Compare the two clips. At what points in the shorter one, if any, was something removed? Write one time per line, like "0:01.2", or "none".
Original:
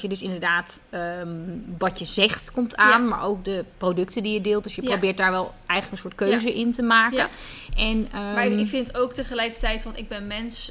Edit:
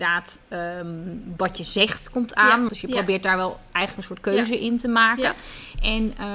0:02.7